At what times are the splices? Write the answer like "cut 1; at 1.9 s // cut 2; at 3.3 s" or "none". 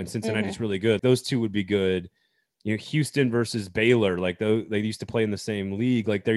cut 1; at 1.0 s